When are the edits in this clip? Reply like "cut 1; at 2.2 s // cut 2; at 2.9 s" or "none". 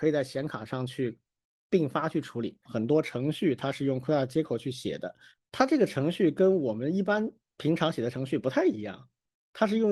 cut 1; at 2.7 s